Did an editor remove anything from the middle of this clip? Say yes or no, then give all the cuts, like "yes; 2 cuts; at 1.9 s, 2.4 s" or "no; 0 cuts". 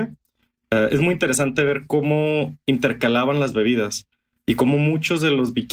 no; 0 cuts